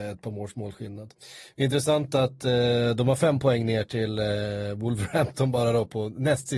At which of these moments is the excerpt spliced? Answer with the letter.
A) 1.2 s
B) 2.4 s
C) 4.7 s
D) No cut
D